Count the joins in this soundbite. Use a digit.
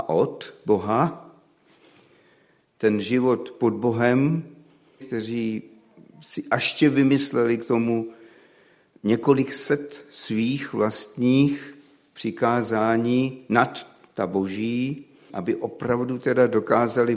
3